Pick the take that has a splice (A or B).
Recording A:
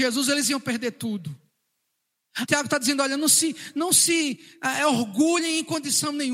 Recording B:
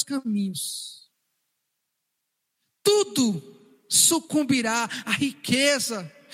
A